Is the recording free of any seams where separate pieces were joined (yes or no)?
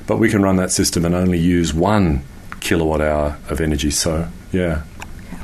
yes